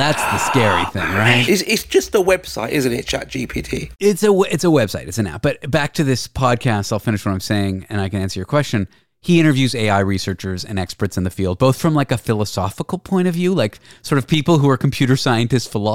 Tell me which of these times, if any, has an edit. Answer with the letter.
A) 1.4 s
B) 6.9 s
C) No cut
A